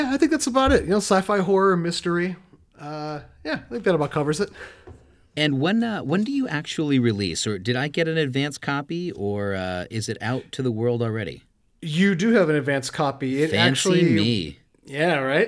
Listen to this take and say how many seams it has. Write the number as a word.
zero